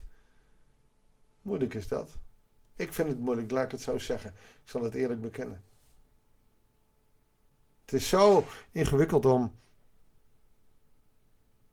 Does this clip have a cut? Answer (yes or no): no